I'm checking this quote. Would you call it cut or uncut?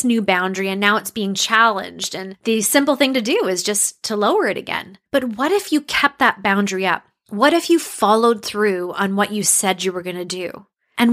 cut